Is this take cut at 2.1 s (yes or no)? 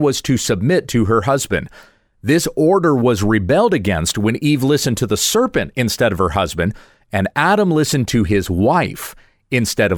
no